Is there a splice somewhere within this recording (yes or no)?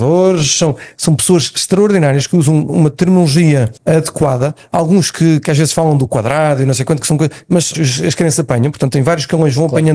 yes